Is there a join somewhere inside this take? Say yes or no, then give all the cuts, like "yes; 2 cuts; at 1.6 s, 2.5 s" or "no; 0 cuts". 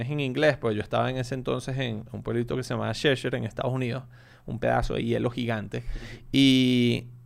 no; 0 cuts